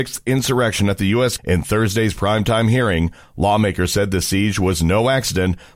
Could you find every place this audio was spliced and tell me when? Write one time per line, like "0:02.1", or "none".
0:01.4